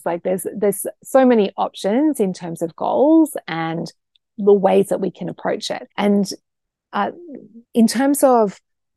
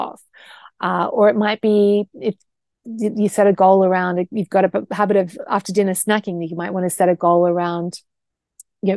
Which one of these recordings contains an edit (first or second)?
first